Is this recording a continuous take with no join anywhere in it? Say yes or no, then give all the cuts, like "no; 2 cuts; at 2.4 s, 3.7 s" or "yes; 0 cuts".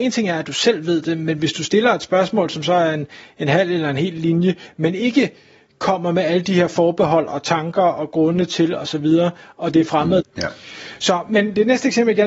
no; 1 cut; at 10.2 s